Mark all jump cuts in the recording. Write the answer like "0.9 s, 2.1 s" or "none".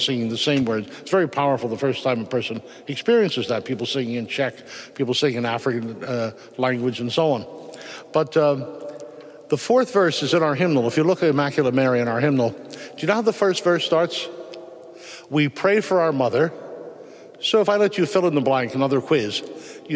none